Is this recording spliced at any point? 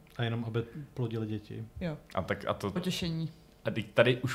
yes; 1 cut; at 2.8 s

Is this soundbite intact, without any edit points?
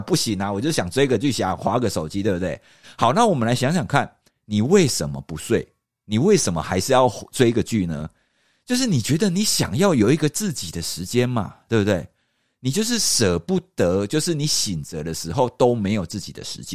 yes; 0 cuts

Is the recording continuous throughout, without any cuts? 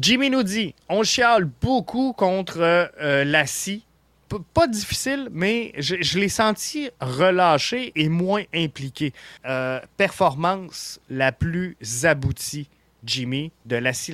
no; 3 cuts; at 4.3 s, 7.9 s, 9.4 s

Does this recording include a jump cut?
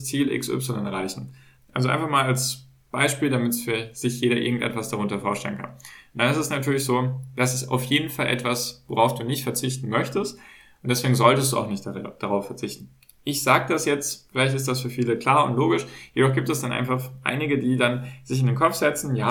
yes; 1 cut; at 1.6 s

